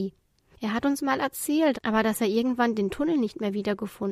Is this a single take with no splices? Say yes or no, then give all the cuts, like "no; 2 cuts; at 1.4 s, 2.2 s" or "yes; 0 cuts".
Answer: no; 1 cut; at 1.7 s